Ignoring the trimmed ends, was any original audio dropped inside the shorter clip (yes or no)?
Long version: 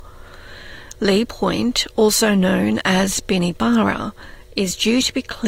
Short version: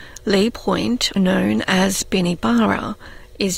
yes